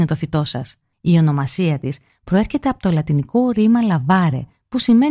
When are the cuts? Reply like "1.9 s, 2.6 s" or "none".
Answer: 0.9 s